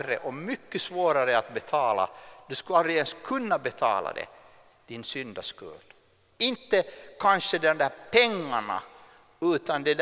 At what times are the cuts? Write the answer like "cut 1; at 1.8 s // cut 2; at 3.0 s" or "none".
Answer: cut 1; at 6.3 s